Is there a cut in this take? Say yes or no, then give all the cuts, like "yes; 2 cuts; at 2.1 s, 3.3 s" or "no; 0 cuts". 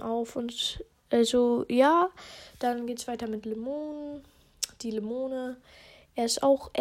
no; 0 cuts